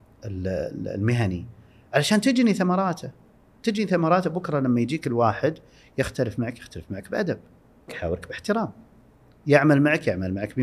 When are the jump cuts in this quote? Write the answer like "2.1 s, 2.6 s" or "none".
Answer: 7.9 s